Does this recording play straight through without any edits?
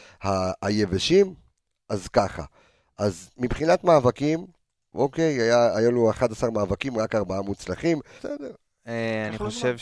no; 2 cuts; at 4.9 s, 8.2 s

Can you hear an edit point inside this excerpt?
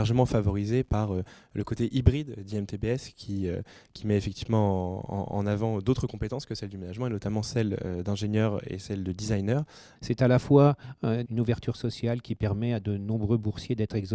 yes; 2 cuts; at 10.0 s, 11.3 s

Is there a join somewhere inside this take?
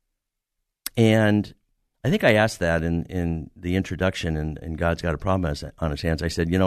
no; 0 cuts

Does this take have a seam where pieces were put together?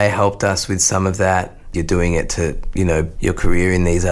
yes; 2 cuts; at 1.7 s, 3.2 s

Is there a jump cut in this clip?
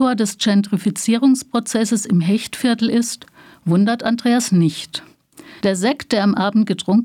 yes; 1 cut; at 5.6 s

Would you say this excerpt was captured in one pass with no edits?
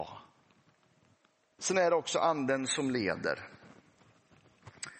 no; 1 cut; at 1.6 s

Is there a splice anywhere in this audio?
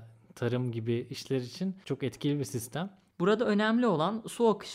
yes; 1 cut; at 3.1 s

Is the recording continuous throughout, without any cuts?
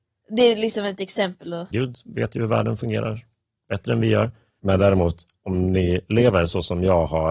no; 2 cuts; at 1.7 s, 4.6 s

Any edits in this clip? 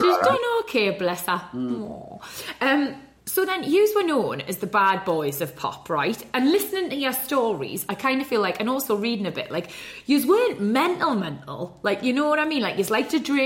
no; 0 cuts

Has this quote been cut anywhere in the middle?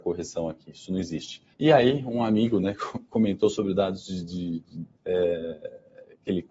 yes; 2 cuts; at 1.5 s, 5.0 s

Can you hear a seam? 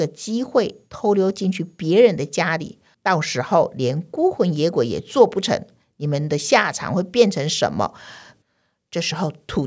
yes; 2 cuts; at 2.9 s, 8.4 s

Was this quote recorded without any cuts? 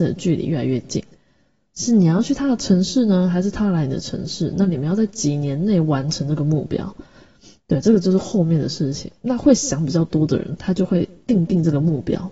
yes; 0 cuts

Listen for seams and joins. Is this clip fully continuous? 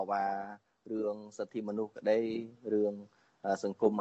yes; 0 cuts

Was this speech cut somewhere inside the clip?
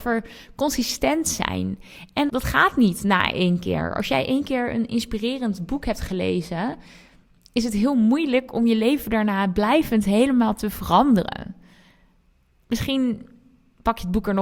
yes; 1 cut; at 2.3 s

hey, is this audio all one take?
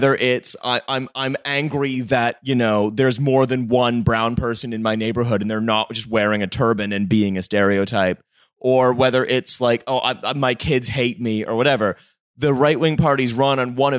yes; 0 cuts

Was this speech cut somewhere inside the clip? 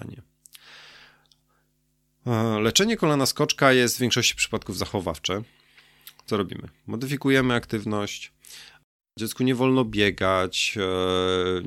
no; 0 cuts

